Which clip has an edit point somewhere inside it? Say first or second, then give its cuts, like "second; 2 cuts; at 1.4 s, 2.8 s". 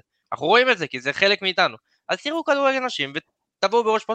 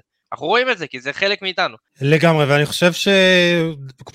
second; 1 cut; at 1.9 s